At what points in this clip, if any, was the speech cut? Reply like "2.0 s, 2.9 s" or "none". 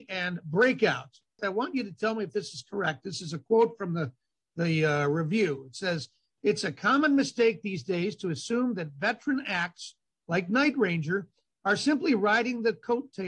1.4 s